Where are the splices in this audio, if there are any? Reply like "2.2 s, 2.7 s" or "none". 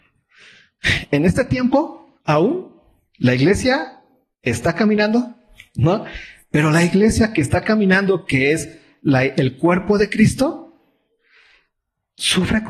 none